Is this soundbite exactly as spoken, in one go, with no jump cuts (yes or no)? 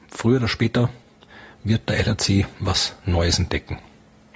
yes